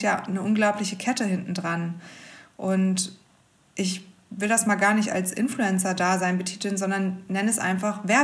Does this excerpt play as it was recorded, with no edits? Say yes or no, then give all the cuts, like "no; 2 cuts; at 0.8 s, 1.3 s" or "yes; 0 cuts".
yes; 0 cuts